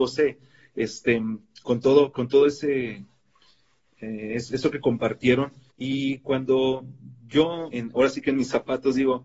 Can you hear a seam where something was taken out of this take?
yes; 2 cuts; at 5.7 s, 7.7 s

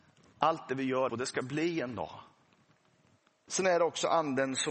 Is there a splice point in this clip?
yes; 2 cuts; at 1.1 s, 3.5 s

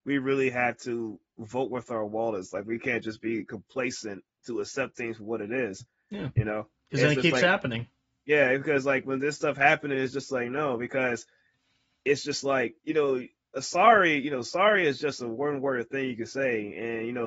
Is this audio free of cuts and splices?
no; 1 cut; at 12.8 s

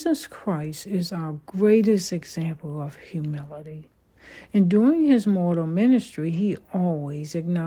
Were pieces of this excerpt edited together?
no; 0 cuts

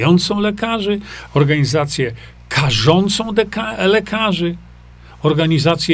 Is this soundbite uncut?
yes; 0 cuts

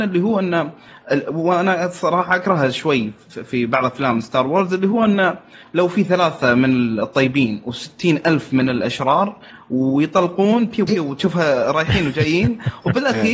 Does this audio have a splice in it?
yes; 1 cut; at 10.9 s

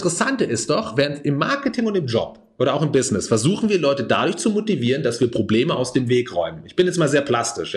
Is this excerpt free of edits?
yes; 0 cuts

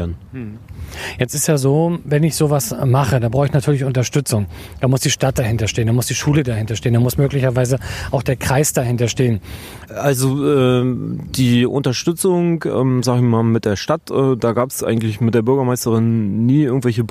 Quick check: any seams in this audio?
yes; 1 cut; at 9.9 s

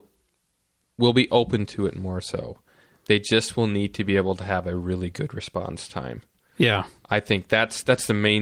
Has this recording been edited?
no; 0 cuts

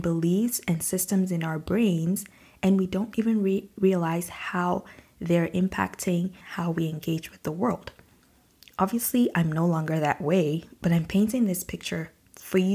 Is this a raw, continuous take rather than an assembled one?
yes; 0 cuts

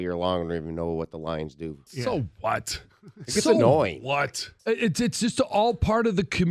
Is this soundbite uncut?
no; 2 cuts; at 1.9 s, 4.6 s

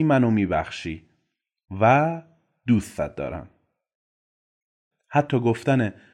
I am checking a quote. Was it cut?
yes; 1 cut; at 4.9 s

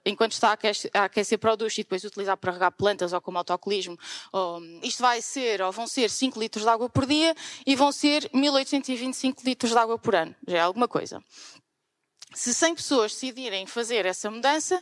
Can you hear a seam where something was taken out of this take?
yes; 1 cut; at 4.8 s

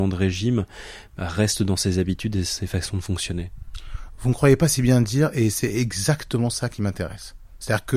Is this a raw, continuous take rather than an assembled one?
yes; 0 cuts

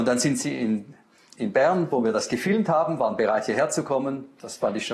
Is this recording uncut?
no; 1 cut; at 1.4 s

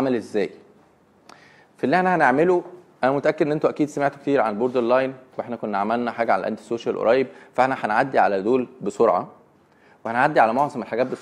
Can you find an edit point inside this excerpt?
no; 0 cuts

